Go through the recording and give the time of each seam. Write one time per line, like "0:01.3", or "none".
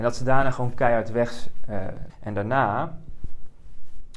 0:02.1